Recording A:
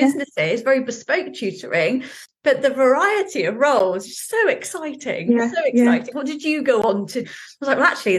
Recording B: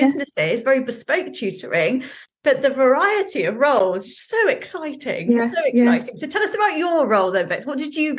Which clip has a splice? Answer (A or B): A